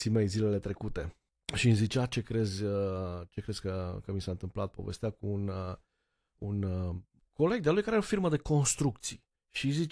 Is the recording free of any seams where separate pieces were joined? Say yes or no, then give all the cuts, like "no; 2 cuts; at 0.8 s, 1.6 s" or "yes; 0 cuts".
yes; 0 cuts